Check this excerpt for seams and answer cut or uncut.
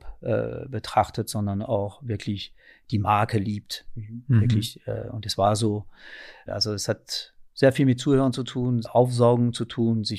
cut